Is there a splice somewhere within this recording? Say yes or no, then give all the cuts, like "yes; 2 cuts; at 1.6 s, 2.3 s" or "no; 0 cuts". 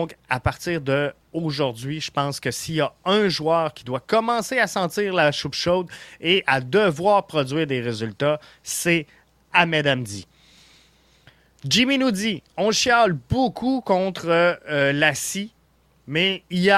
no; 0 cuts